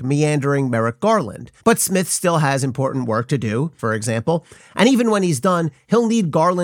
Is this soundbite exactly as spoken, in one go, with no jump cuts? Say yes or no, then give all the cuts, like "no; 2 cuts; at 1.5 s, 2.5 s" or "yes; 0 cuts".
no; 2 cuts; at 1.6 s, 3.8 s